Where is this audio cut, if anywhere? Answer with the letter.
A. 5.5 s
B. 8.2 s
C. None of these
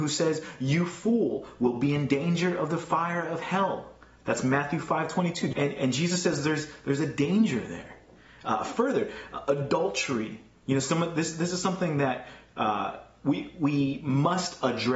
A